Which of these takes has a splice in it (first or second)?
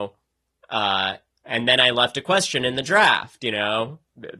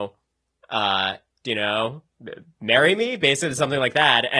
second